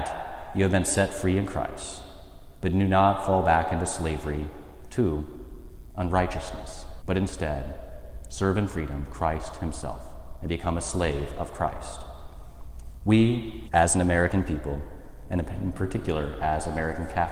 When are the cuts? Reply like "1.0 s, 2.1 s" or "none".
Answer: 7.0 s, 13.7 s

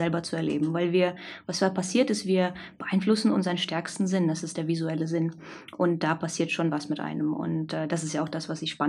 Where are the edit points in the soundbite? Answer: none

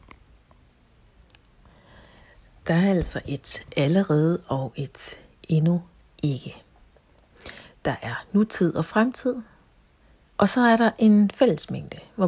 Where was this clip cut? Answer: none

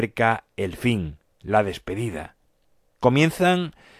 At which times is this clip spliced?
none

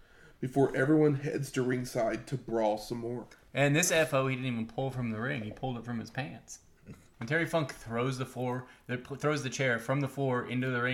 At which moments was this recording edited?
7.1 s

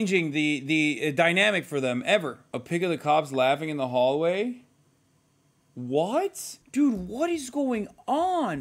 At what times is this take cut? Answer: 6.6 s

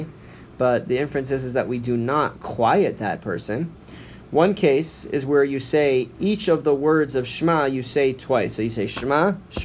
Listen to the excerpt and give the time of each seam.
4.2 s

